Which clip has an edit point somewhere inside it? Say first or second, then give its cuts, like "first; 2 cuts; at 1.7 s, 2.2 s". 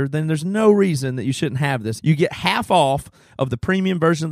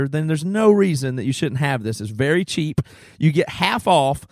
first; 1 cut; at 2.0 s